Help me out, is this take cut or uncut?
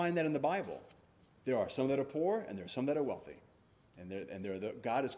uncut